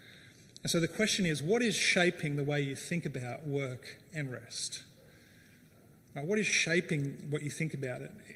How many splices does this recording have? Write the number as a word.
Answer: zero